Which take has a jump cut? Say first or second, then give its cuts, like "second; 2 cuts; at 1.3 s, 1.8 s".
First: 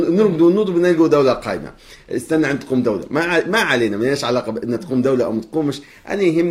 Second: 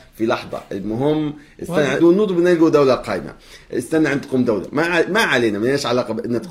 second; 1 cut; at 2.0 s